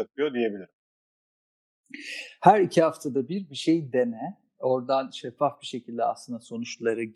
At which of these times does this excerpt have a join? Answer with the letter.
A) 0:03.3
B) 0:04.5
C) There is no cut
C